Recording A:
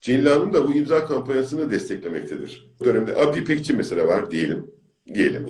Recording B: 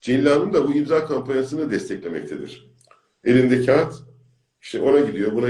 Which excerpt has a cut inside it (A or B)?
A